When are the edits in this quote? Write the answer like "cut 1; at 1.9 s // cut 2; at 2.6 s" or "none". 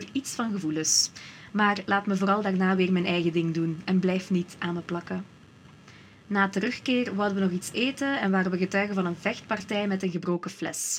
none